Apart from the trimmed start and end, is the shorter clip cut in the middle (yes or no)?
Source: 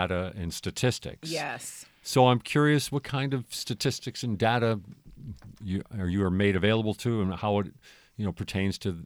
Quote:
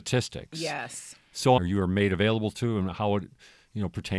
yes